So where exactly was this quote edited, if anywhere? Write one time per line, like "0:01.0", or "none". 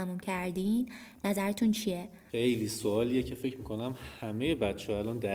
0:02.3